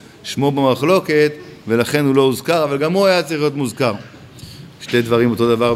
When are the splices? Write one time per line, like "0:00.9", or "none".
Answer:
0:04.7